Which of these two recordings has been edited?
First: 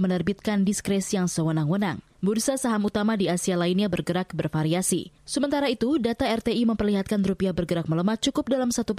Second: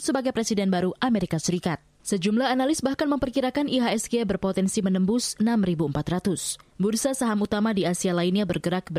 first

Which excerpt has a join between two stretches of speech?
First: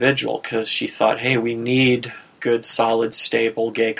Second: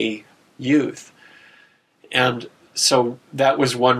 first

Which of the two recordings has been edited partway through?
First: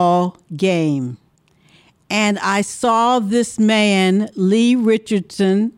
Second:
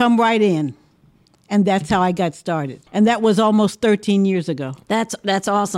second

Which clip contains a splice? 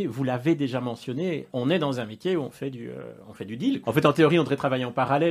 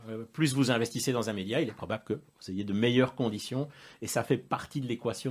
first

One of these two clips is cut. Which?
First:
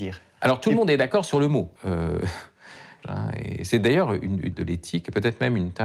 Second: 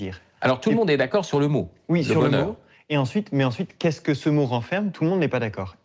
first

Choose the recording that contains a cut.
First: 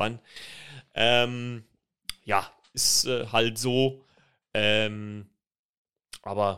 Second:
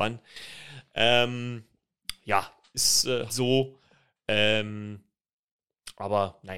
second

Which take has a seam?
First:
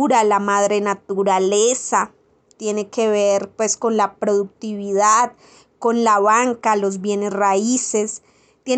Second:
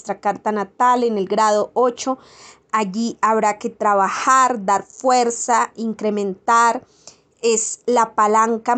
first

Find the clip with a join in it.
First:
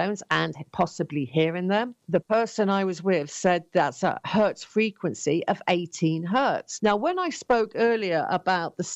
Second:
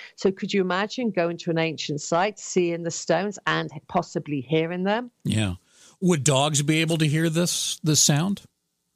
first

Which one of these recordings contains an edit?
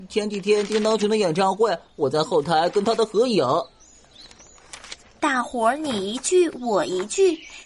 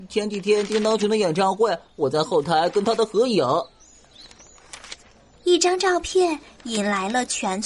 first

